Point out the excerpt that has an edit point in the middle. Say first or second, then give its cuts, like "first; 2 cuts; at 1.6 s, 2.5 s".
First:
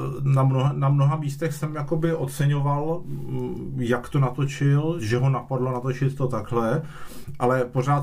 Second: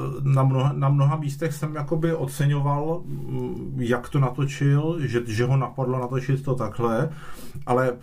first; 1 cut; at 5.0 s